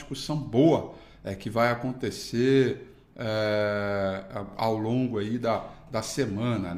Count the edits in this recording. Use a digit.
0